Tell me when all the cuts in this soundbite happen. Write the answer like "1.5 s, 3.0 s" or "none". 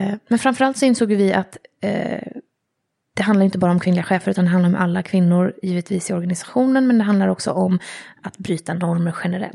none